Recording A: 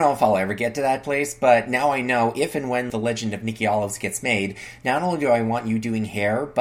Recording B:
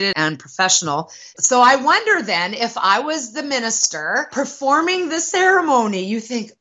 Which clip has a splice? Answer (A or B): B